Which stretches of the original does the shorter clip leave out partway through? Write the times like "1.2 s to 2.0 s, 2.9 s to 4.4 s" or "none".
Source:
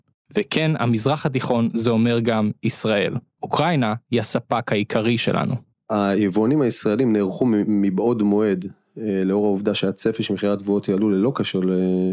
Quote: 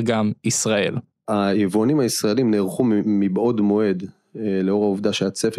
3.3 s to 5.7 s